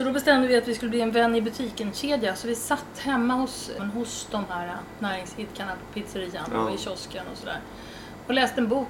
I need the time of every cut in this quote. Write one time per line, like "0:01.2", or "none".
0:03.8